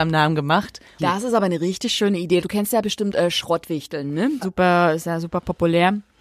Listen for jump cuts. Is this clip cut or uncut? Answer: cut